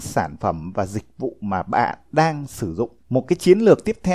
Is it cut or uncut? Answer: cut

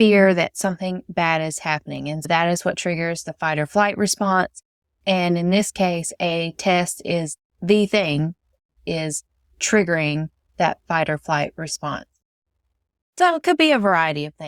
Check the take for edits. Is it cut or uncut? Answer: uncut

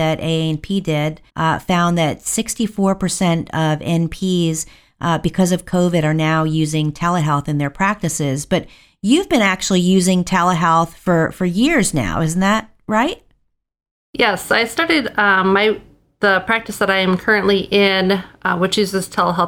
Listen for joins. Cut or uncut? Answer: cut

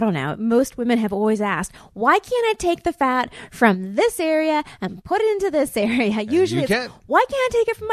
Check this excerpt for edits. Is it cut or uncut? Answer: uncut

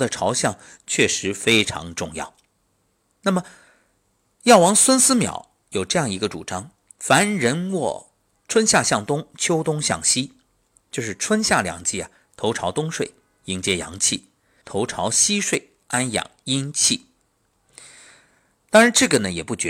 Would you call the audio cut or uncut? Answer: cut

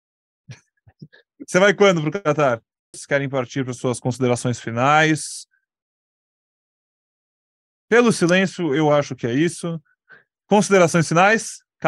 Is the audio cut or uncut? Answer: cut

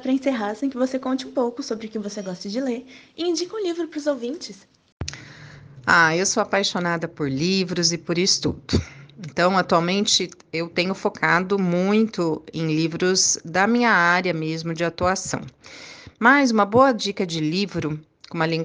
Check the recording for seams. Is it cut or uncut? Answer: uncut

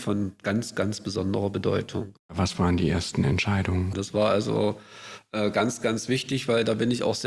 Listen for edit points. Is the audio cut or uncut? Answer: cut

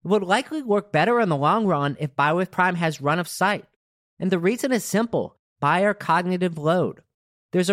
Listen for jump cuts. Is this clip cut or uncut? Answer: uncut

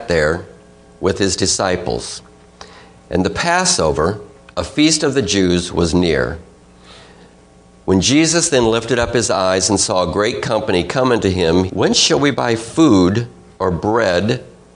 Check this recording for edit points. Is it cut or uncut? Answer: cut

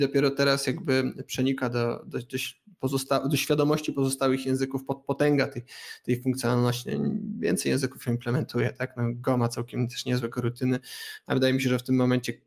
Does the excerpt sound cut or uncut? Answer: uncut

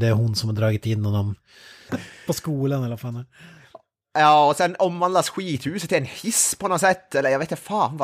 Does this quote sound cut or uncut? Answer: cut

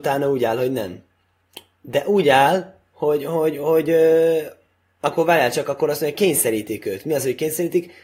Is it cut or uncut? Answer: cut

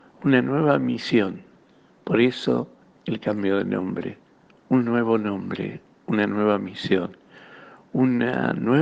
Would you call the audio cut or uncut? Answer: uncut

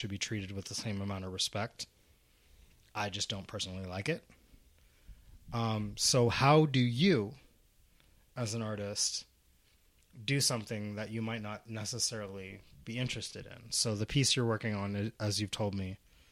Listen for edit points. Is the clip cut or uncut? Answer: uncut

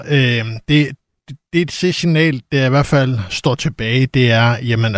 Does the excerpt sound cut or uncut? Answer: uncut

